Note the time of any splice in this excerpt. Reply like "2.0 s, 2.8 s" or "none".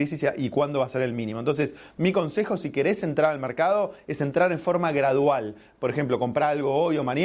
none